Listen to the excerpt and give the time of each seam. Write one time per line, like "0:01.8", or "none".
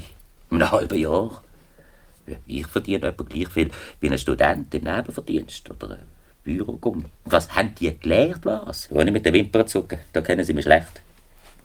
0:07.1
0:08.9